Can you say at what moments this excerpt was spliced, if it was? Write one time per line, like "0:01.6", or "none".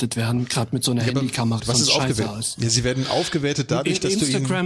0:01.6